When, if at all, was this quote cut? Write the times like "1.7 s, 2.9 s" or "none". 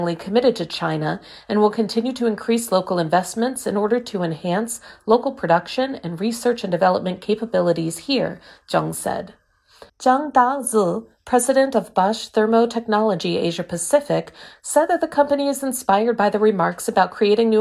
9.9 s, 14.6 s